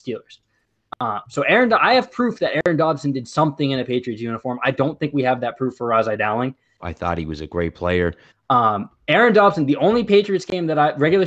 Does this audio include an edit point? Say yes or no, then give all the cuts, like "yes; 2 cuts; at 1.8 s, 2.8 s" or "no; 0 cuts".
yes; 2 cuts; at 6.8 s, 8.3 s